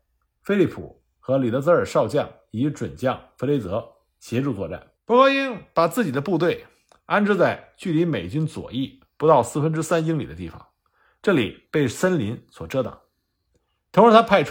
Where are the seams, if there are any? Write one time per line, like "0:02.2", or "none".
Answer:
0:04.9